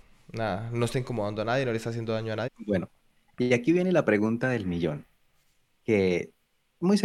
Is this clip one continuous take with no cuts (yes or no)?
no